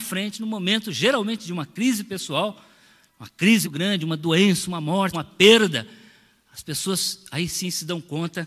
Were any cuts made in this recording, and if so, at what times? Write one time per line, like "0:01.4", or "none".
0:03.6
0:05.1